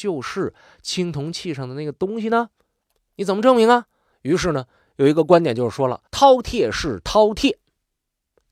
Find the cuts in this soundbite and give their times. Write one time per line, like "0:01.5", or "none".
0:04.1
0:06.1